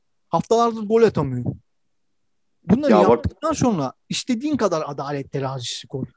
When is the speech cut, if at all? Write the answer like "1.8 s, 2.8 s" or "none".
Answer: none